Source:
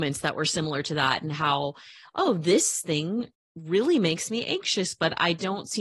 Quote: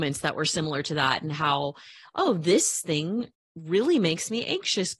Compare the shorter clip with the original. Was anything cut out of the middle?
no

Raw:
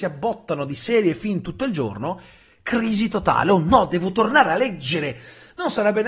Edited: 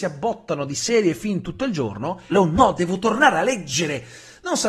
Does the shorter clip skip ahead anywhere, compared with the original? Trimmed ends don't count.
yes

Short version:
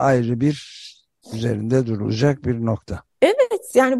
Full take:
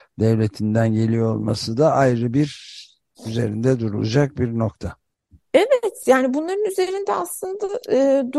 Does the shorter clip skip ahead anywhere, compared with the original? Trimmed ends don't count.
yes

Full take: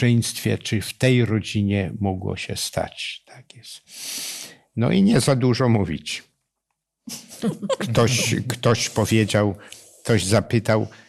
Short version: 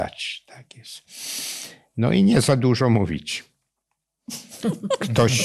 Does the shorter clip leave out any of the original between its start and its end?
no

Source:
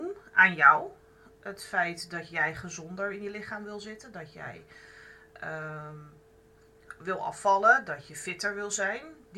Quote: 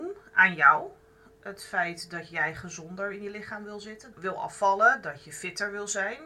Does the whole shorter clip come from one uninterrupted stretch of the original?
no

